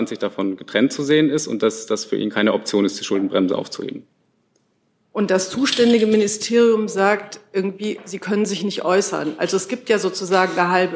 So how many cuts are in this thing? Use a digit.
1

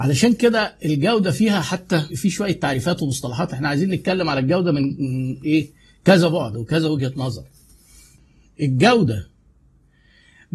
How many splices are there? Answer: 1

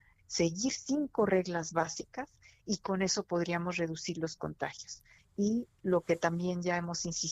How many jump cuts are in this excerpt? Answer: 1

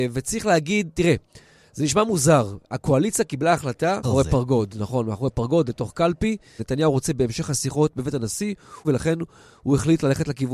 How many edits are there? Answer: 3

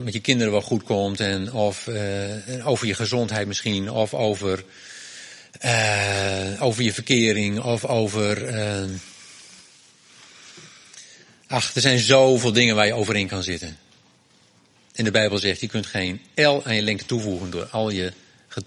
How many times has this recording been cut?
0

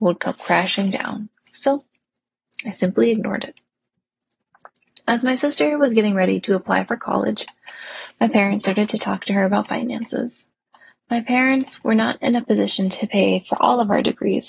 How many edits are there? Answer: 0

